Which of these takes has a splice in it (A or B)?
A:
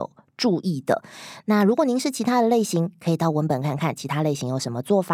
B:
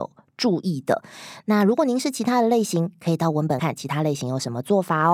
B